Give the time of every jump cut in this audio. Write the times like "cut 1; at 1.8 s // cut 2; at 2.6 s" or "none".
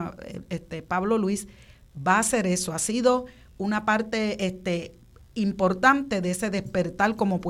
none